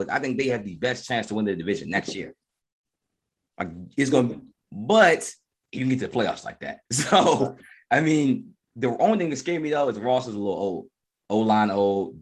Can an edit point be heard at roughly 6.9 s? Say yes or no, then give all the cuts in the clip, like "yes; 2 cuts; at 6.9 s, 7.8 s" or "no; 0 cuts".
yes; 2 cuts; at 4.6 s, 6.9 s